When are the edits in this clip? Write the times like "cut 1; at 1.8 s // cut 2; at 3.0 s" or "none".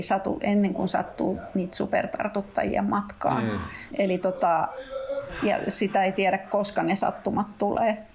cut 1; at 3.9 s